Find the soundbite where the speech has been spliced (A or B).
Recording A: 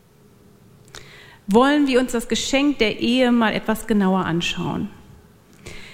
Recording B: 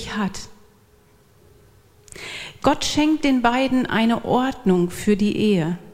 B